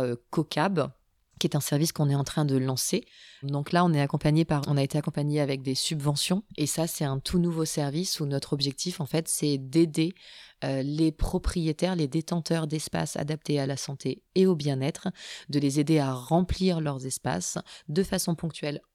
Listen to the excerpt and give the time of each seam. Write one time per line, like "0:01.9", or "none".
0:03.4
0:04.6
0:06.5